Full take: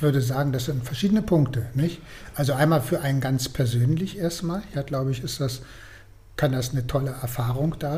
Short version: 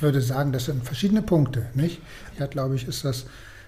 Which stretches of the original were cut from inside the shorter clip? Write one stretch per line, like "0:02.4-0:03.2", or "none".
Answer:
0:02.3-0:04.7